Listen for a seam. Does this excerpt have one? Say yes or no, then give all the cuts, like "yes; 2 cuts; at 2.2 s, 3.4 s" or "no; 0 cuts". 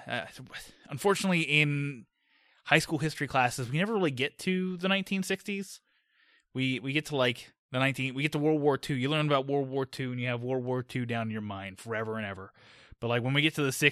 no; 0 cuts